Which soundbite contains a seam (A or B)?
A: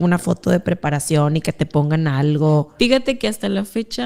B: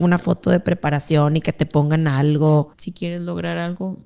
B